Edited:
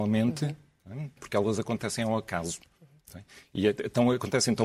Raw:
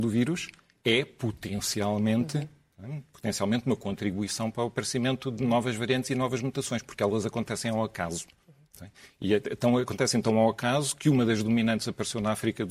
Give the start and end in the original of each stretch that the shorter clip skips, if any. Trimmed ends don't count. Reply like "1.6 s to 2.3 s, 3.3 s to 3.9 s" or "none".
3.1 s to 6.8 s